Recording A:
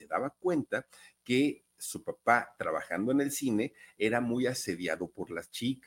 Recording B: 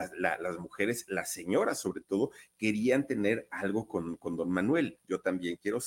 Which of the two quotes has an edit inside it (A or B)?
B